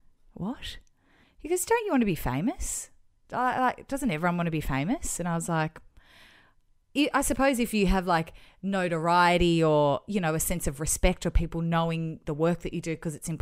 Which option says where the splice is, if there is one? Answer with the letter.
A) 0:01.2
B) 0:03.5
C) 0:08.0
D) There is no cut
A